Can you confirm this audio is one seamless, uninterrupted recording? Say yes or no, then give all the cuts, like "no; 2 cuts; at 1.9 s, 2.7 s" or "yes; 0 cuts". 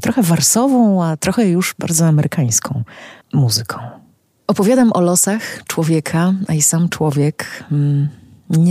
no; 1 cut; at 3.2 s